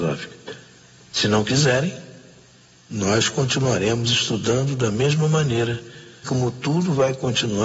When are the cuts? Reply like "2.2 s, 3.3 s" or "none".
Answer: 6.2 s